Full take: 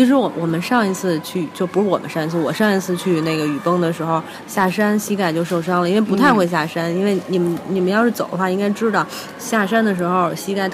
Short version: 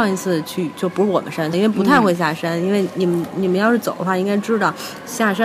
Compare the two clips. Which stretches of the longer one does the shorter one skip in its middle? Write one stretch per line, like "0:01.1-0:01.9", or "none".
0:02.3-0:05.9